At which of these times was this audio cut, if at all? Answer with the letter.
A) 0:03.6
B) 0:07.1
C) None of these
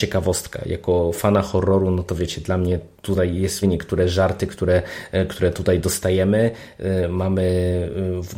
A